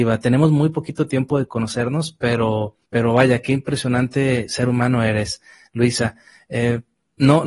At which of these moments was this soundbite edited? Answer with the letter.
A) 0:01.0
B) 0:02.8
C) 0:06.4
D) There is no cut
B